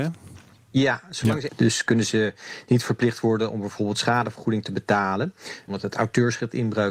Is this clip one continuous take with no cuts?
no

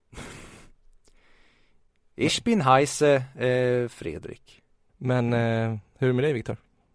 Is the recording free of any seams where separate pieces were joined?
no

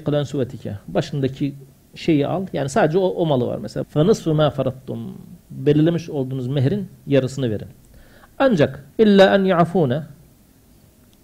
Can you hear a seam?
yes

